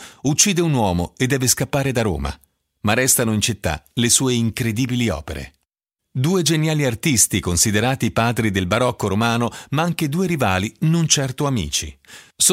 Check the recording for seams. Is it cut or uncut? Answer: cut